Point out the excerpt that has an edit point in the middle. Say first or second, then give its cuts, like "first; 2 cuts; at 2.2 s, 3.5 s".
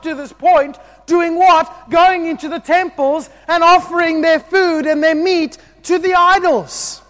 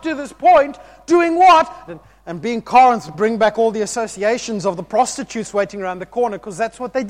second; 2 cuts; at 1.9 s, 3.1 s